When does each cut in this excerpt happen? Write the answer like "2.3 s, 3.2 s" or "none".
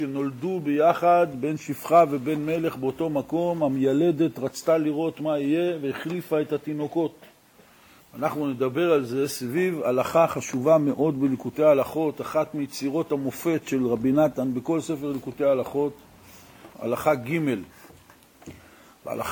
8.0 s, 16.7 s